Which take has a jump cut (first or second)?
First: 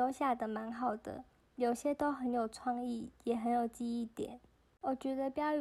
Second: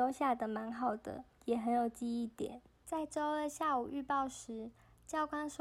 second